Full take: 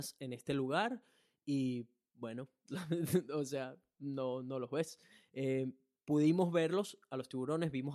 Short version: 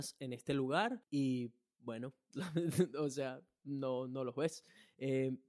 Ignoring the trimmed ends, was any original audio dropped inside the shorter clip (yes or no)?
yes